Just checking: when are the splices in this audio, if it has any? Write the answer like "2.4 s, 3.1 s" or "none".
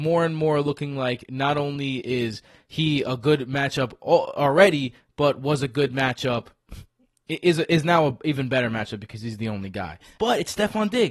10.2 s